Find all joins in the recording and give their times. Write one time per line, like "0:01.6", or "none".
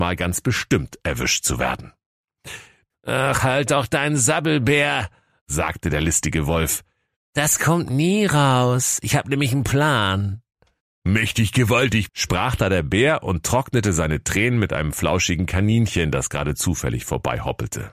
0:02.9
0:12.1